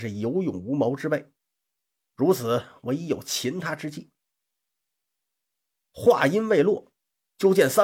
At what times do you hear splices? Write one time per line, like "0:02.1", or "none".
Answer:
none